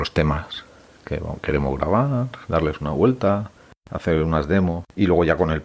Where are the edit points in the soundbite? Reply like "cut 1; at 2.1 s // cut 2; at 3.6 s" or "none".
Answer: none